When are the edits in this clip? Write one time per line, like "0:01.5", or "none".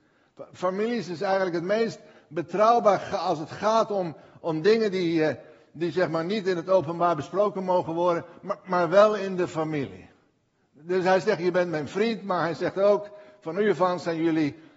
none

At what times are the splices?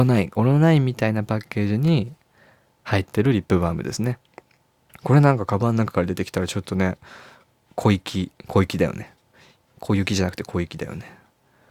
0:04.9

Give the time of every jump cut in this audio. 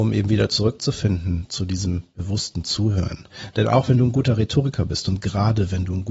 none

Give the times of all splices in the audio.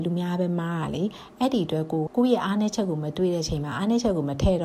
0:02.1

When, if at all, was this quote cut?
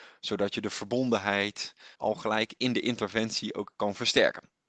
0:02.0

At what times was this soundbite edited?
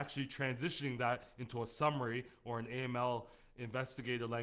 none

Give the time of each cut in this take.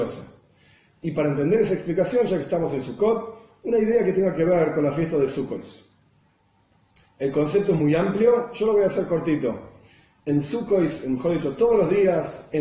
none

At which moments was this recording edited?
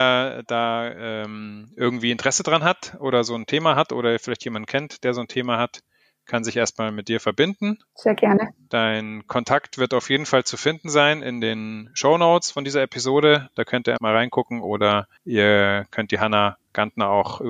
0:14.0
0:15.2

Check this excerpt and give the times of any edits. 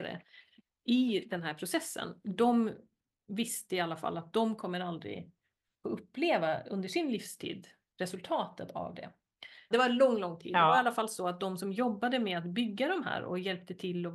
0:09.7

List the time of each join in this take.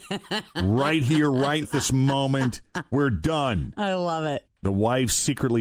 0:01.6
0:04.4

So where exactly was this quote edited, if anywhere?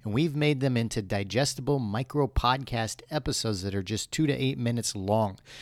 none

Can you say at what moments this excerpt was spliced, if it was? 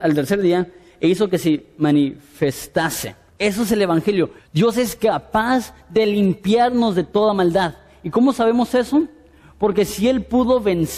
0:03.3
0:04.4

